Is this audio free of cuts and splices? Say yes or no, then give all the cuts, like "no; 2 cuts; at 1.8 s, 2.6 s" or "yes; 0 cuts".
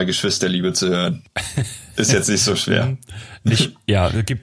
yes; 0 cuts